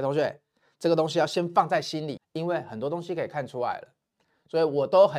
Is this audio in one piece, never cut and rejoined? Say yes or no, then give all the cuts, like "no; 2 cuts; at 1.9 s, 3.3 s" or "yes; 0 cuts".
no; 1 cut; at 2.2 s